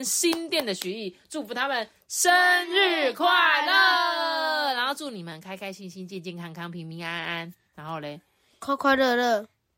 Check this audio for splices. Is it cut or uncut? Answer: uncut